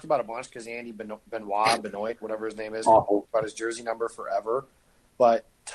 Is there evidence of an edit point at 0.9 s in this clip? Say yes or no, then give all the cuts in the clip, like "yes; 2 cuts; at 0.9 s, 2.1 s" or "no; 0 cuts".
no; 0 cuts